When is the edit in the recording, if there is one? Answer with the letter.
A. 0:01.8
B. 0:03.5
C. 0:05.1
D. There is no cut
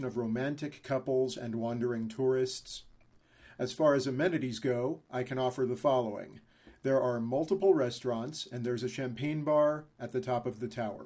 D